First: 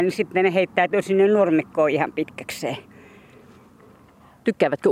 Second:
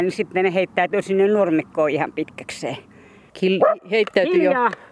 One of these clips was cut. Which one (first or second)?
second